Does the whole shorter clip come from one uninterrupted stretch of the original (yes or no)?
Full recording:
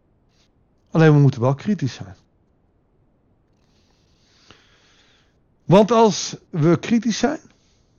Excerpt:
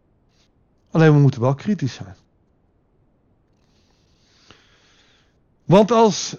yes